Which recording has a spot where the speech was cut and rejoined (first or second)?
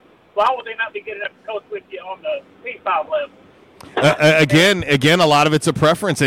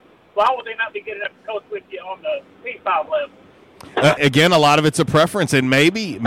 second